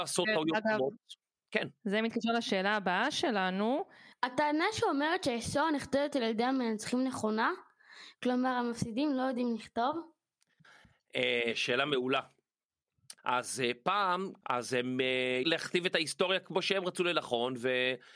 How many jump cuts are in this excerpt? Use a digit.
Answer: 3